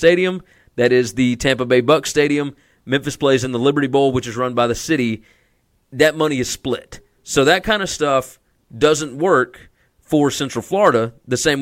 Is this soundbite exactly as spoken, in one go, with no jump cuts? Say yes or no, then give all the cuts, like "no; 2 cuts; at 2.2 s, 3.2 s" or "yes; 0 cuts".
yes; 0 cuts